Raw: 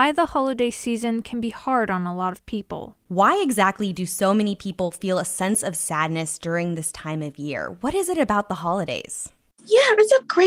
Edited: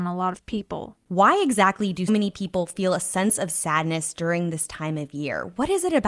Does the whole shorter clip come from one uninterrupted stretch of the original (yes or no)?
no